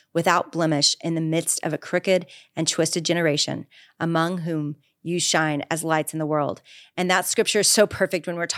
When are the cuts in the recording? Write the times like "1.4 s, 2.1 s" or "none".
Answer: none